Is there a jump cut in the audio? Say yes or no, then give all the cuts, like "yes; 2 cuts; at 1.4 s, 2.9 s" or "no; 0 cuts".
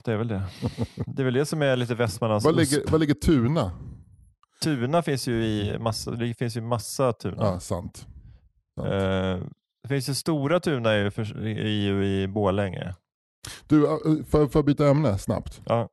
no; 0 cuts